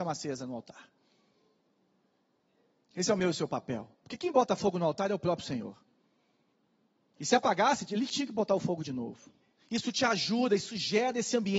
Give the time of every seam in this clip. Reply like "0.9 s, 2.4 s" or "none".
9.6 s